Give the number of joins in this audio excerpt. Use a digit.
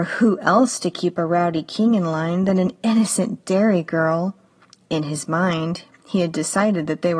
0